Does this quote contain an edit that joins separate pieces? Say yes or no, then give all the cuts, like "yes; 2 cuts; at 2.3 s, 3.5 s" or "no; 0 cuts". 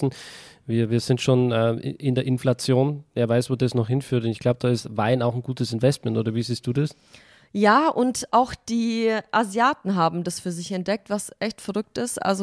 no; 0 cuts